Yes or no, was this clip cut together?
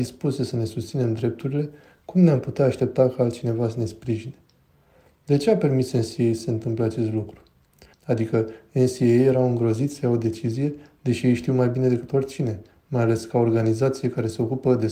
yes